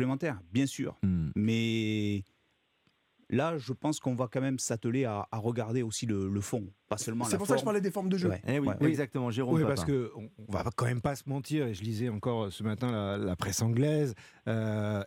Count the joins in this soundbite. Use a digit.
0